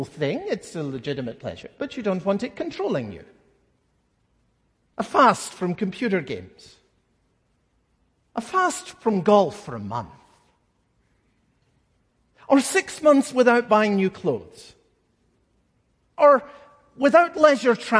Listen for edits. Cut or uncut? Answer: uncut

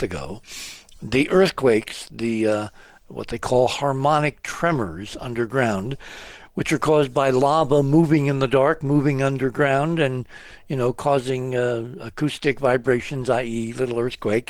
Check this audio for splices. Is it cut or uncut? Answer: uncut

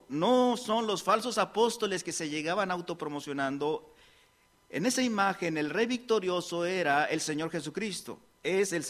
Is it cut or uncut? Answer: uncut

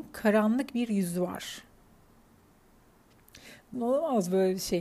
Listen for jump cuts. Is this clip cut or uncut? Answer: cut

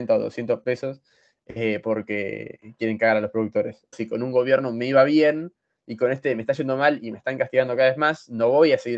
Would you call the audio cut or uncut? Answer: cut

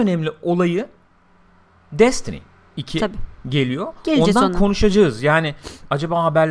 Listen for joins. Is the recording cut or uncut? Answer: uncut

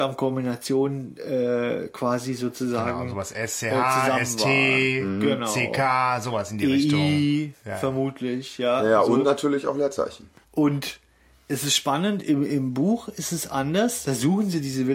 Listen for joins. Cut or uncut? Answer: uncut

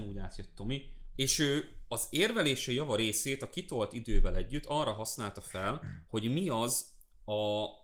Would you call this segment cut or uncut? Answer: cut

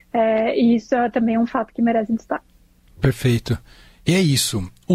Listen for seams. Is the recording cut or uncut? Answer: uncut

